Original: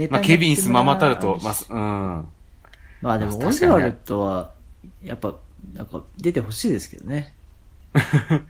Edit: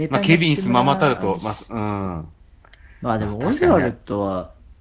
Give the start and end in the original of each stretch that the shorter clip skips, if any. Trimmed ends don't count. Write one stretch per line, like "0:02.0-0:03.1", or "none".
none